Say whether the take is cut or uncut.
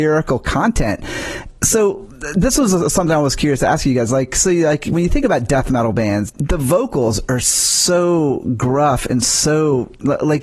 cut